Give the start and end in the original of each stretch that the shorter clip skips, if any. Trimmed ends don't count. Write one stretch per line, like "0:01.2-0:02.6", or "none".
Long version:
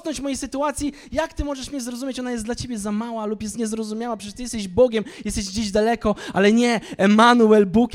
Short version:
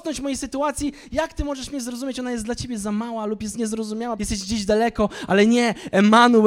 0:04.2-0:05.2